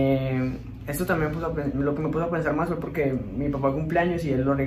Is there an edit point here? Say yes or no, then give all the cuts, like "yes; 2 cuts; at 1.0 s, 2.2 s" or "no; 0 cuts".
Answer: no; 0 cuts